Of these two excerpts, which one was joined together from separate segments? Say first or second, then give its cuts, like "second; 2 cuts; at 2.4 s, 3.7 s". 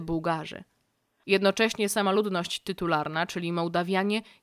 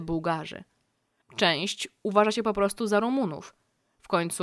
second; 1 cut; at 1.2 s